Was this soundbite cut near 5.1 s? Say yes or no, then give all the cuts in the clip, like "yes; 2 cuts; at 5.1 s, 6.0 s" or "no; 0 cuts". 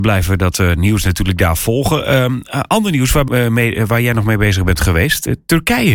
no; 1 cut; at 3.3 s